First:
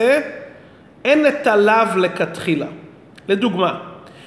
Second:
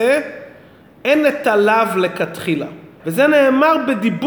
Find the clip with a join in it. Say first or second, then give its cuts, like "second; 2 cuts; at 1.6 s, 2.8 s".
second; 1 cut; at 3.0 s